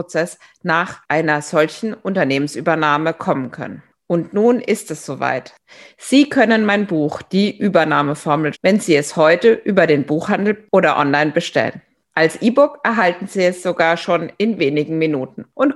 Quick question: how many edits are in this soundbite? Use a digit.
1